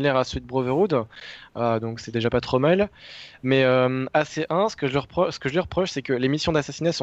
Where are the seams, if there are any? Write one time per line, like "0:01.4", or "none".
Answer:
none